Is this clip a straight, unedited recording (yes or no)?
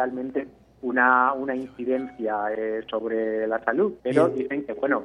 no